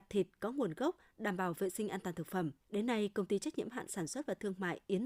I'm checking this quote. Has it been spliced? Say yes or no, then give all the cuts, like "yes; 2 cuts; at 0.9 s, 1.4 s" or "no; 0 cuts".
yes; 1 cut; at 2.6 s